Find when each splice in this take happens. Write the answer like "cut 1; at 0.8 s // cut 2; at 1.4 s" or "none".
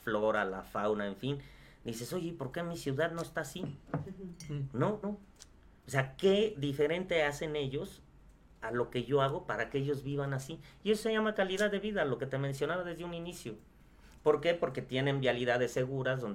cut 1; at 5.0 s